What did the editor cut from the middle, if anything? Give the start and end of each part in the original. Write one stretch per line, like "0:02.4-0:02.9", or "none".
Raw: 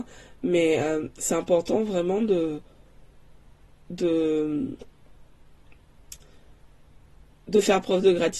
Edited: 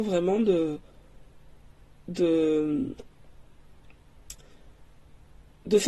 none